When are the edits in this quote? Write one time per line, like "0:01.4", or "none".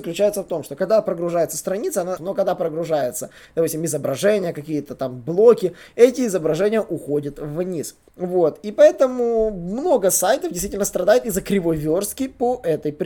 0:02.2
0:08.1